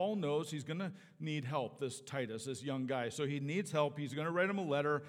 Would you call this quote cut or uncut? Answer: uncut